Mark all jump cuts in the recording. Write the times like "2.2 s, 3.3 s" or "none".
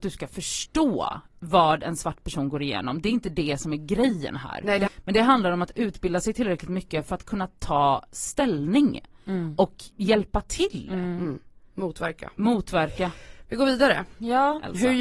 4.9 s, 9.9 s